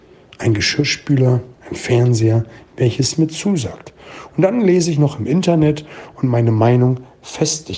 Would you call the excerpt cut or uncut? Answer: cut